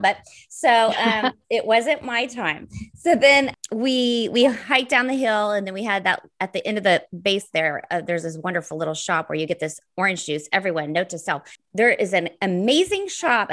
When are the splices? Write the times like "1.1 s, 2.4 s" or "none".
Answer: none